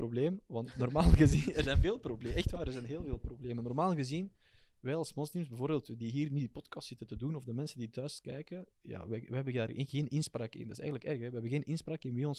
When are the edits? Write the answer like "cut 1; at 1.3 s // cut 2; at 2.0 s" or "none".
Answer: none